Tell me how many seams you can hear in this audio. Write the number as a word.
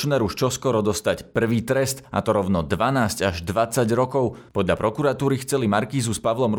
one